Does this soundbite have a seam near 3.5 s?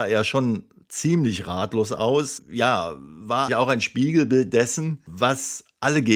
yes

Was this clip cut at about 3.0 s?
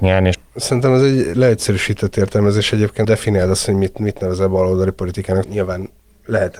yes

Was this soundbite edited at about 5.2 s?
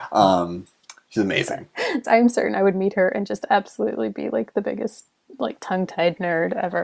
no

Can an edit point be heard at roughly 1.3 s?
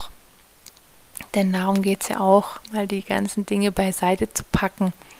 no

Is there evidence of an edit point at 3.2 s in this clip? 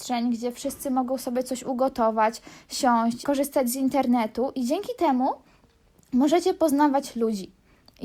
yes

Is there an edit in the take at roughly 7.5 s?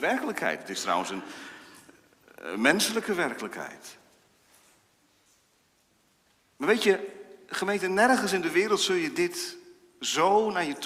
no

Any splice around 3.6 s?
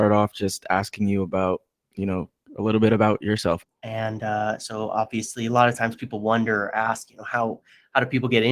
yes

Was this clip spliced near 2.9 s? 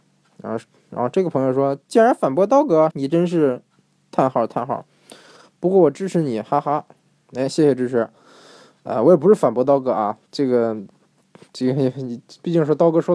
yes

